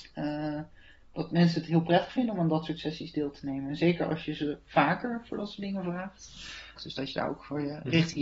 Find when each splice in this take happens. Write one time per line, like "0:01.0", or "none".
0:06.8